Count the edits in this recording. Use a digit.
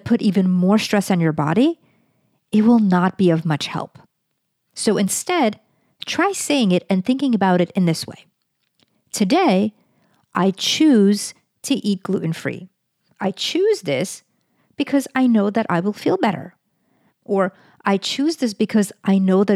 1